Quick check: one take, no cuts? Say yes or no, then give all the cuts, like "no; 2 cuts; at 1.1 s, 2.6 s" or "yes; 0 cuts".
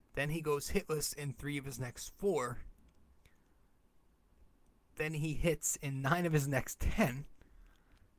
yes; 0 cuts